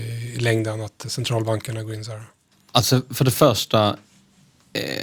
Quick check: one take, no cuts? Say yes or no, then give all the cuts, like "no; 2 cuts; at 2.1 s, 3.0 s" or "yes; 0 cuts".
no; 1 cut; at 2.7 s